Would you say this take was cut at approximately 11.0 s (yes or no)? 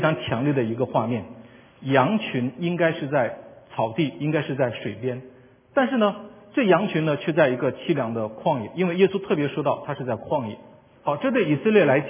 yes